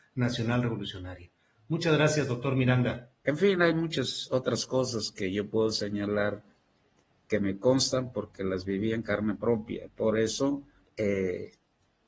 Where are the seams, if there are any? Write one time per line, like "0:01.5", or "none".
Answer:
0:03.2
0:10.9